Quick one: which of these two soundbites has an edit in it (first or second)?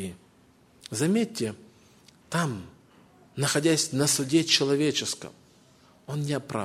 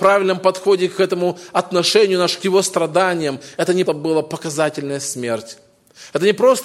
second